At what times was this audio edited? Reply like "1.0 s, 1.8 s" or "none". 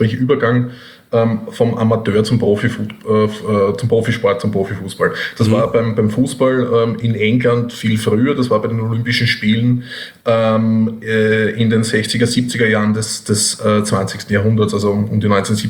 none